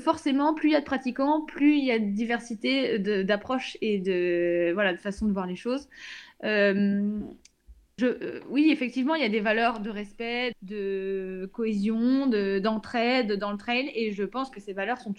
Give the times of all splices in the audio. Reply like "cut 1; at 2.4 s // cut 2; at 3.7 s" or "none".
cut 1; at 8.0 s // cut 2; at 10.5 s